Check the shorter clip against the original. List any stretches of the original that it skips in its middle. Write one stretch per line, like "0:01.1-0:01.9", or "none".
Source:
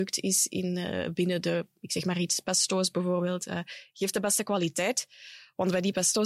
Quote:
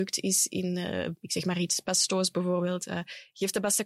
0:01.2-0:01.8